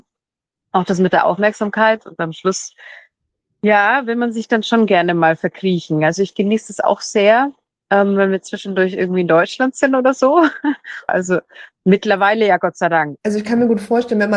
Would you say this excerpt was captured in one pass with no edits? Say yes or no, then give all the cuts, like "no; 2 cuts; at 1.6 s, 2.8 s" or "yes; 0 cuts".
no; 2 cuts; at 11.1 s, 13.2 s